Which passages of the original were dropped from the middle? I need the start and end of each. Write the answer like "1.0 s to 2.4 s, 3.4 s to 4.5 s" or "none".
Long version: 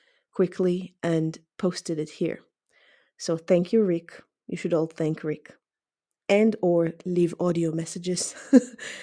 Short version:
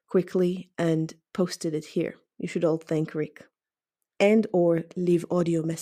2.6 s to 4.4 s